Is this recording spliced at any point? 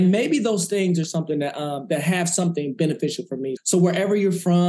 yes; 1 cut; at 3.6 s

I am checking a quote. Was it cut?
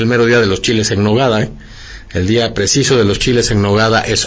no; 0 cuts

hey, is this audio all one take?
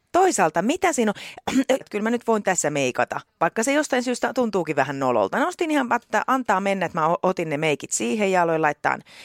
no; 2 cuts; at 1.8 s, 5.3 s

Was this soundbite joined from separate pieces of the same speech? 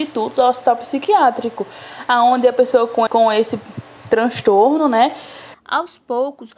yes; 2 cuts; at 3.1 s, 5.5 s

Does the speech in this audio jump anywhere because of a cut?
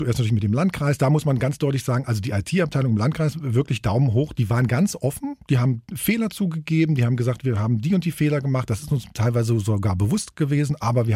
no; 0 cuts

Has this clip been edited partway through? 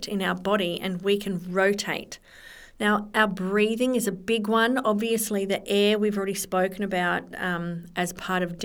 yes; 1 cut; at 2.7 s

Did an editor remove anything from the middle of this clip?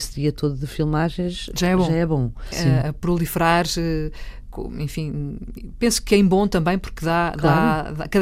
yes; 1 cut; at 2.5 s

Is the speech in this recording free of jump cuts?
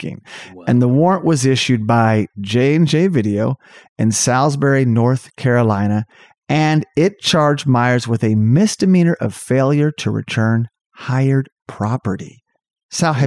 yes; 0 cuts

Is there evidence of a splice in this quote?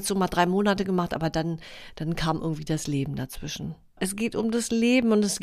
yes; 1 cut; at 4.0 s

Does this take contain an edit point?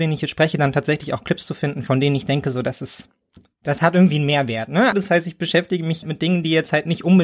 yes; 2 cuts; at 4.9 s, 6.0 s

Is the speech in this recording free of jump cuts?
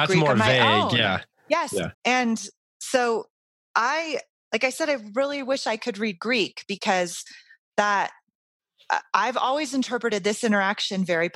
no; 1 cut; at 1.9 s

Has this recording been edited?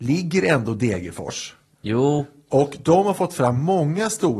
no; 0 cuts

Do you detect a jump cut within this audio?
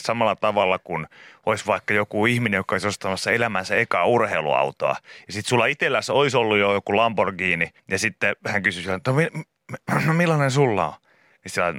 yes; 1 cut; at 7.8 s

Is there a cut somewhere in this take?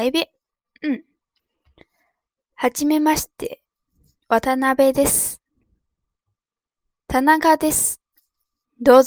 no; 0 cuts

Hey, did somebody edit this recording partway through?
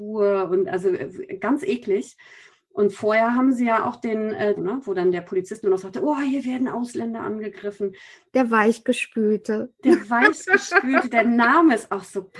yes; 2 cuts; at 4.6 s, 8.3 s

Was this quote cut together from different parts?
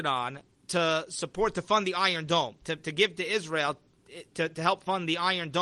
yes; 1 cut; at 2.8 s

